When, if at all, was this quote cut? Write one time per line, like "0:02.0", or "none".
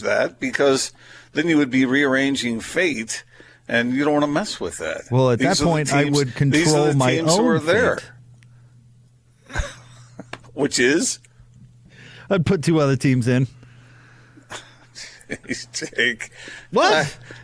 none